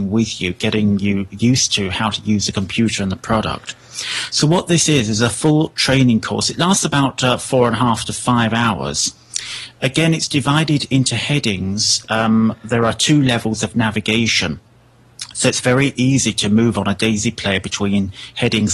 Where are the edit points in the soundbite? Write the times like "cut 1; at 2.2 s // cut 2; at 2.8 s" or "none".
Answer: none